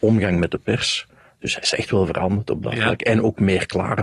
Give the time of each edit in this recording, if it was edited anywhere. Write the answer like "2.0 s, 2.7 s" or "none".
none